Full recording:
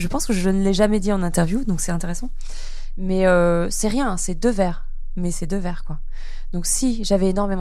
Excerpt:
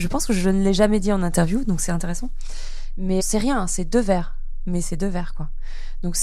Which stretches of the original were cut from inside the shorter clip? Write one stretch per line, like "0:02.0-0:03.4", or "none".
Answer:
0:03.2-0:03.7